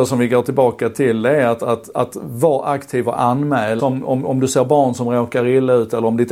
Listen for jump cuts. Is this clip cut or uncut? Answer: cut